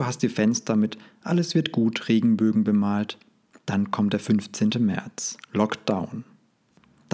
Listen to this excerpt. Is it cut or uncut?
uncut